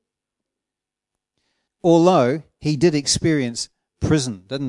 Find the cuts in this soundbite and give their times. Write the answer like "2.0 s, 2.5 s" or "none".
1.7 s